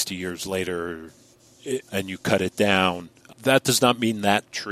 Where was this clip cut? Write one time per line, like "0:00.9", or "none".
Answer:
0:01.9